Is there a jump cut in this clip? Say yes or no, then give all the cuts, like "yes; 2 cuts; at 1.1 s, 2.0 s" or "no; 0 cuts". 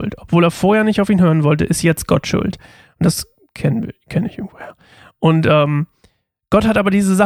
no; 0 cuts